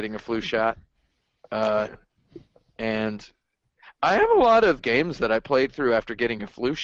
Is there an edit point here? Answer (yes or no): yes